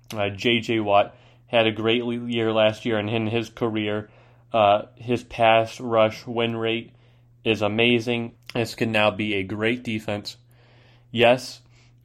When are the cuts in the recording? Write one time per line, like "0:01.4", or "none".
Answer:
0:08.3